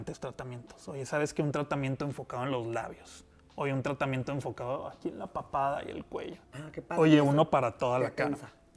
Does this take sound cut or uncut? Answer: cut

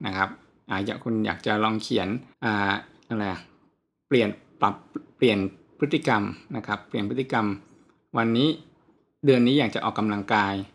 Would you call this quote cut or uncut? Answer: cut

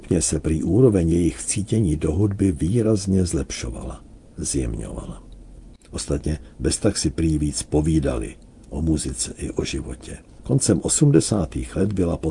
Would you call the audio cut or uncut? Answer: cut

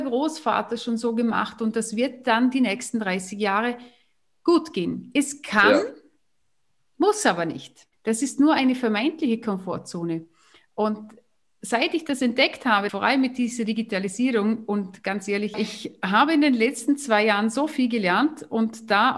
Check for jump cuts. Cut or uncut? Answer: cut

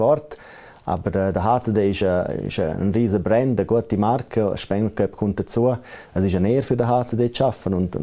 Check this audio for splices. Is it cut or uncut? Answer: uncut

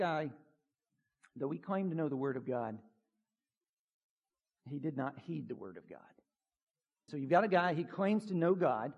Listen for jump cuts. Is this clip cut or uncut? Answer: cut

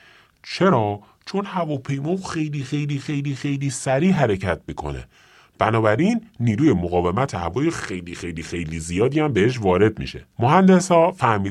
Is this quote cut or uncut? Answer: cut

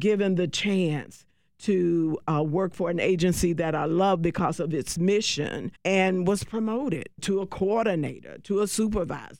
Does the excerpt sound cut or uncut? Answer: uncut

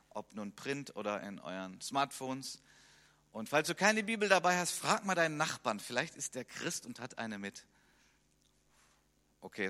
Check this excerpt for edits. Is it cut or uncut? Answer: uncut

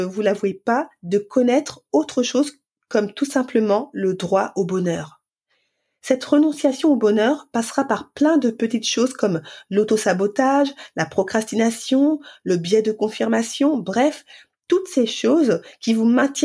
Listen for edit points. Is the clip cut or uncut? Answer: uncut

